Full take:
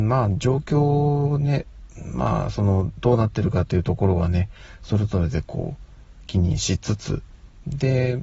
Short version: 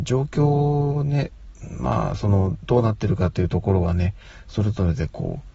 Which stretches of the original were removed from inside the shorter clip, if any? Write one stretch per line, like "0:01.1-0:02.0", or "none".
none